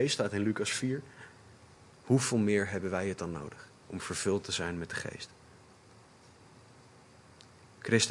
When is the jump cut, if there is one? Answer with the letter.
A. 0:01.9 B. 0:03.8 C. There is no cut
B